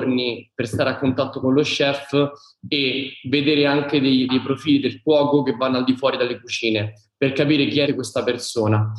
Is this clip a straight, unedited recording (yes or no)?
no